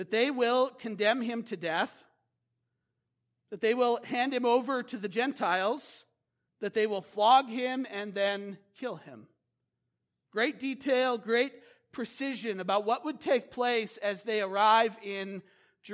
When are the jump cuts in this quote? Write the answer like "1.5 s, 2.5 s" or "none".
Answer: 6.5 s, 10.2 s